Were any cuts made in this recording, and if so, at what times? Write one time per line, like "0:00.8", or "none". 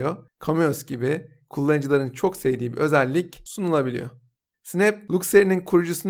0:04.5